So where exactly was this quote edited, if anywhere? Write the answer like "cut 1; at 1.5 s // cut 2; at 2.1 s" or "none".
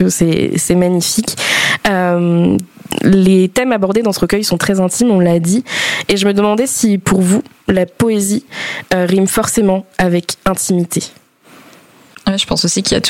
cut 1; at 12.1 s

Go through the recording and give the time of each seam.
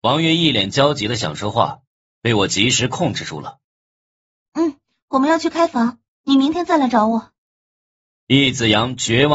none

